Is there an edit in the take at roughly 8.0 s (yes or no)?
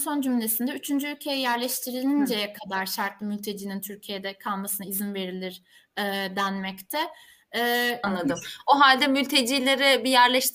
yes